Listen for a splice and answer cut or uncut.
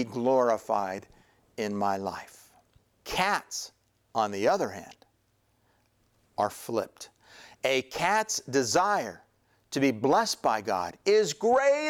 uncut